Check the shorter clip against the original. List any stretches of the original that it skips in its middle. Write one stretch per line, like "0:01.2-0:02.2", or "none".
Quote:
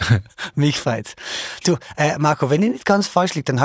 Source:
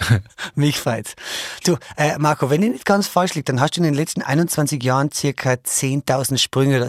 none